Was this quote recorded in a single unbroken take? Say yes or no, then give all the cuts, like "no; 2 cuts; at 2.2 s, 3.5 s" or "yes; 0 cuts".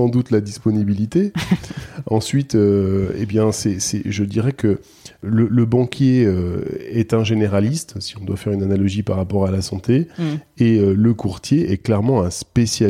yes; 0 cuts